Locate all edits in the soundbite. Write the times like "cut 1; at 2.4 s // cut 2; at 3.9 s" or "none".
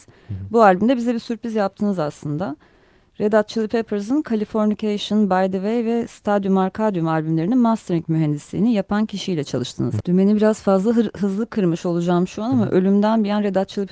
cut 1; at 10.0 s